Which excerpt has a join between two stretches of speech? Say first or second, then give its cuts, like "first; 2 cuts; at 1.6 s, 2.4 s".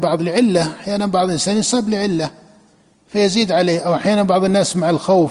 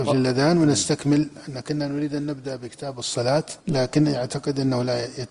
second; 1 cut; at 3.6 s